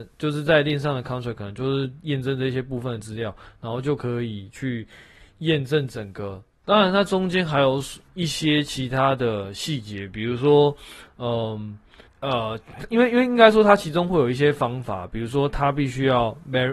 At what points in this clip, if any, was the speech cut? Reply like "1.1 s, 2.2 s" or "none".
6.5 s, 12.1 s